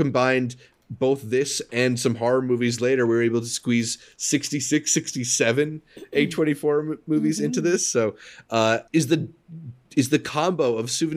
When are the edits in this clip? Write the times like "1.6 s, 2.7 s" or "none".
8.9 s